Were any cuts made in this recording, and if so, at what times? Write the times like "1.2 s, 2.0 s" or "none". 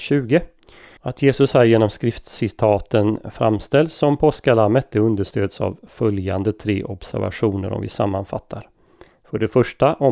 1.0 s